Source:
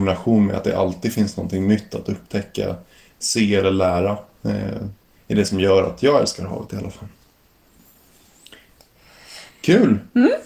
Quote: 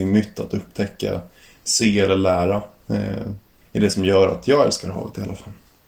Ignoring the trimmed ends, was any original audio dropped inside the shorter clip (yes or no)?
no